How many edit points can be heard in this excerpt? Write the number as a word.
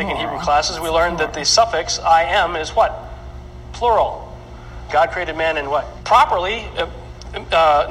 two